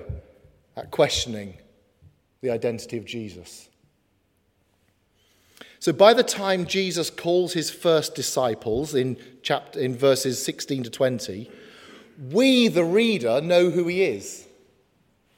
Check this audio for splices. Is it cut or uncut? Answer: uncut